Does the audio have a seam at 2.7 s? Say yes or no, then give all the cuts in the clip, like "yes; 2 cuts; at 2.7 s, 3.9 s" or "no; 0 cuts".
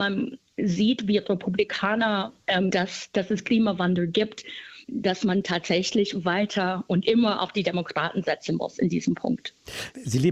yes; 2 cuts; at 2.7 s, 4.8 s